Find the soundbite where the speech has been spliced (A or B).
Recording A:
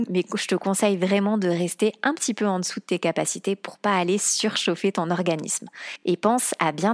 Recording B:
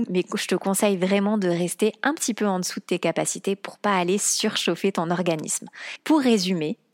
B